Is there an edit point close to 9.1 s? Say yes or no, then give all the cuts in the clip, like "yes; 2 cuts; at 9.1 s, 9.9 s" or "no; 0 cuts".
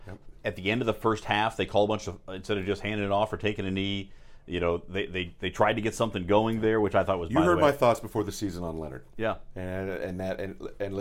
yes; 1 cut; at 9.1 s